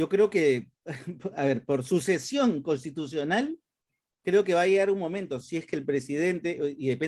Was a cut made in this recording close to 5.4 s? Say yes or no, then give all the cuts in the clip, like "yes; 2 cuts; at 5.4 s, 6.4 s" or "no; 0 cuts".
no; 0 cuts